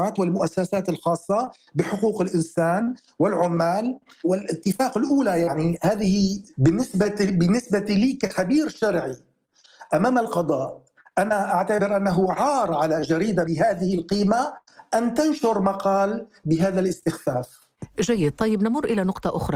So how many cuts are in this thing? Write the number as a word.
zero